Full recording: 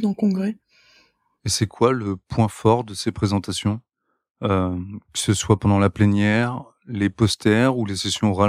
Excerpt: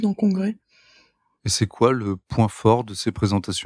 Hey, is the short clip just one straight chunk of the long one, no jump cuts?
yes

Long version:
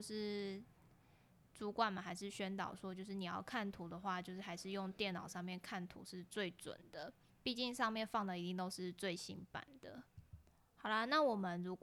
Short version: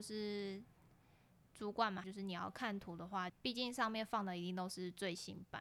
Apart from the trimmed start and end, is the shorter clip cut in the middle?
yes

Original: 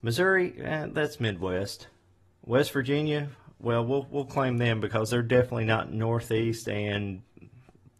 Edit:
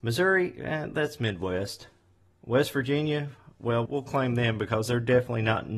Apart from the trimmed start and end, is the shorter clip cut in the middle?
yes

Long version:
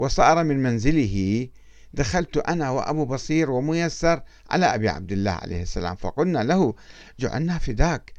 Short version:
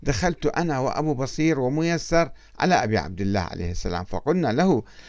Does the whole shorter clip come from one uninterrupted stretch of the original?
yes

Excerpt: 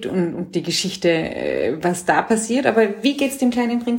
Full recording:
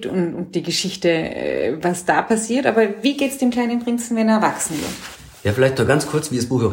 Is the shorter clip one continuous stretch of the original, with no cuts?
yes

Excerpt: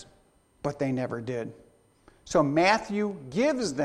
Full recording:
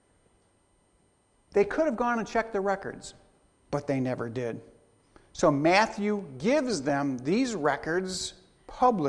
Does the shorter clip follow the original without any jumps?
yes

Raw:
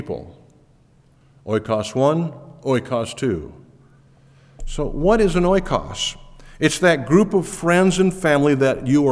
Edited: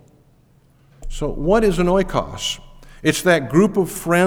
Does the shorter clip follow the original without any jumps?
no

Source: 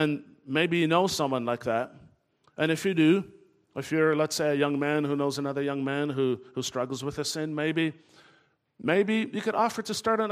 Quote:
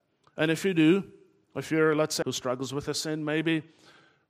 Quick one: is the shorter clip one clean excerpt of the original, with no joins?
no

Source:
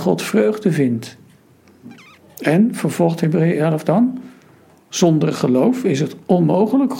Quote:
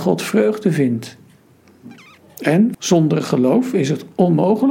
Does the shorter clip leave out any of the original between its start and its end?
yes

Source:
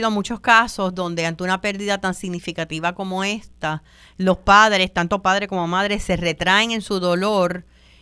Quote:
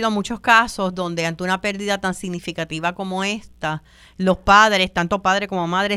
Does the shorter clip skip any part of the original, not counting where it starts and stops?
no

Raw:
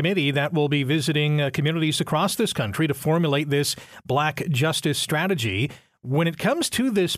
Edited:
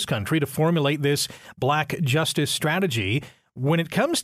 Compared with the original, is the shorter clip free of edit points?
yes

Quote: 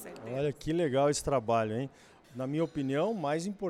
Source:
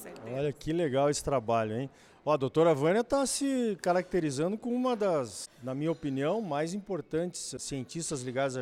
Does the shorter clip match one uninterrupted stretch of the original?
no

